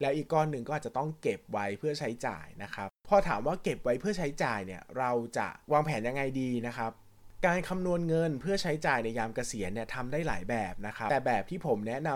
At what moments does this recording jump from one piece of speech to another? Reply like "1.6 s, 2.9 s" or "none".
3.0 s